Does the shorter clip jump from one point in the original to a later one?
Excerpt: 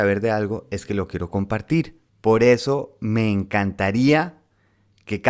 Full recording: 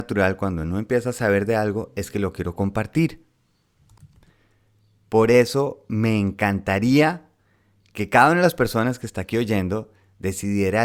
yes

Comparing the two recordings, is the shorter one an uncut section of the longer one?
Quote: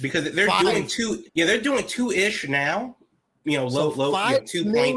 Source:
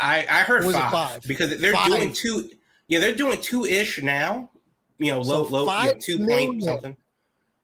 no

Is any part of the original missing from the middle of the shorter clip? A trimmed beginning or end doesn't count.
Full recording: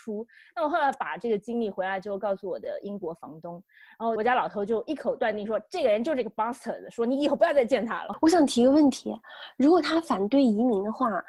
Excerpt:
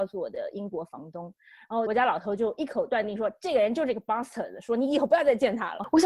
no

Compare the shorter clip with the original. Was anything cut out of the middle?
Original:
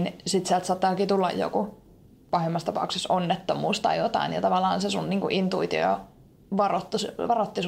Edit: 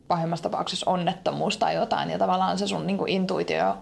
no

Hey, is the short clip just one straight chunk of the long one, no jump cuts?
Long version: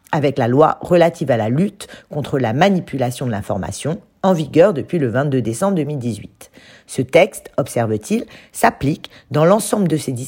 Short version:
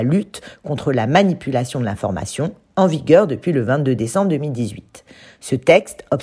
yes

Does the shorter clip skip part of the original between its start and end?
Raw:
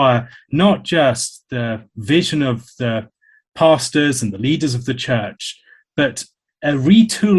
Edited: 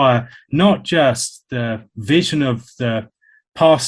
no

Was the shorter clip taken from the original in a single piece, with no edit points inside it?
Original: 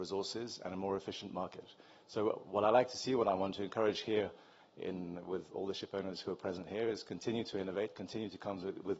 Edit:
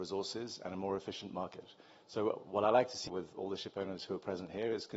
no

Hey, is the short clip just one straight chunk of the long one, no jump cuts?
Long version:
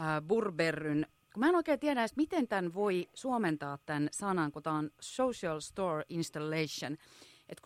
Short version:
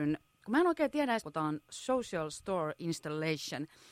no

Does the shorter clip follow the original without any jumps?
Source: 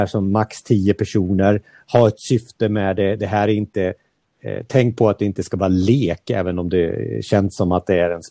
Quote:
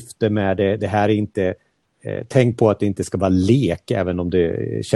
yes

